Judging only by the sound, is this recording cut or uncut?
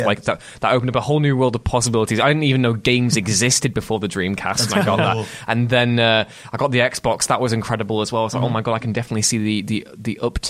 uncut